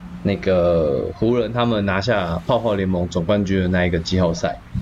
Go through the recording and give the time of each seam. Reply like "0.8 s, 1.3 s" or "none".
none